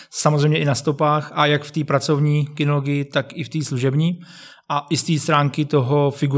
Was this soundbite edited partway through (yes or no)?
no